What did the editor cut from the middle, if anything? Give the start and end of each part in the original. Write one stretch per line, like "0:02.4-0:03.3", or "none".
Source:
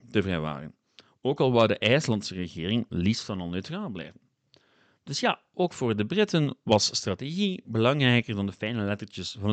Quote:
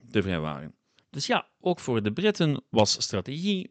0:01.0-0:04.9